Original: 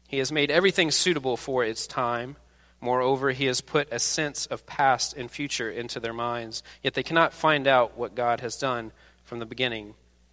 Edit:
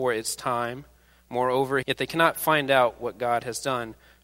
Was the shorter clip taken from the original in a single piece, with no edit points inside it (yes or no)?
no